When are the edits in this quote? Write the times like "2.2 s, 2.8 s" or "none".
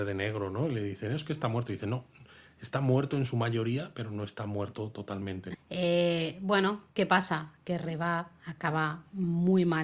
5.5 s

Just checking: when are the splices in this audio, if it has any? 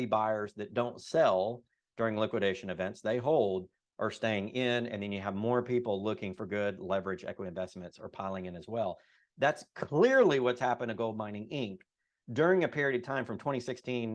none

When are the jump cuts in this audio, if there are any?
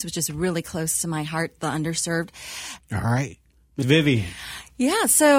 2.8 s

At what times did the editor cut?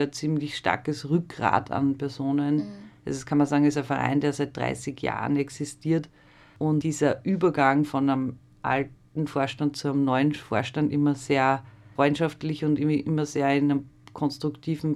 3.0 s

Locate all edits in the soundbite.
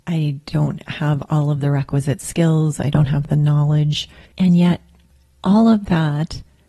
4.3 s

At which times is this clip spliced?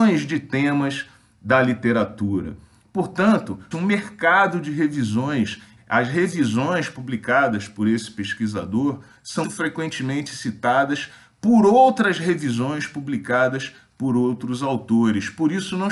3.7 s, 5.8 s, 9.4 s

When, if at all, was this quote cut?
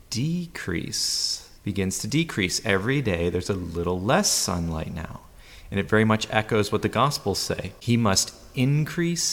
1.6 s

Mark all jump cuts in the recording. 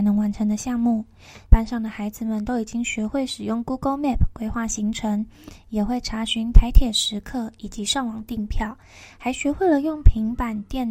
1.5 s

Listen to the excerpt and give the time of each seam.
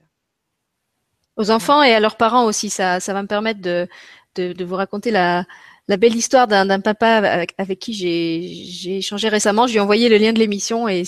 none

